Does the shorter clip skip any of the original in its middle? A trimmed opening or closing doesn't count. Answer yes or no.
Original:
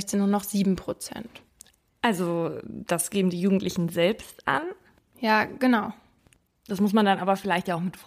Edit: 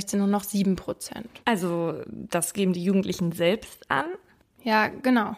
yes